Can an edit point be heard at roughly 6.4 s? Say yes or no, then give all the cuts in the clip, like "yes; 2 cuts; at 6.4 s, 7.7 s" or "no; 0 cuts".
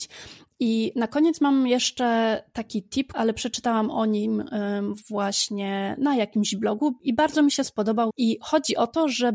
no; 2 cuts; at 3.1 s, 8.1 s